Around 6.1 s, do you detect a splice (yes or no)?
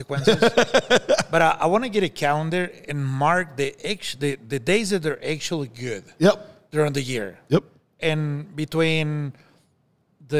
no